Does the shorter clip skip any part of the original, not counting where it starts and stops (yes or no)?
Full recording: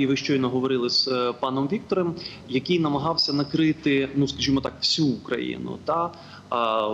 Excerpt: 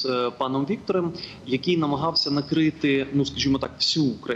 no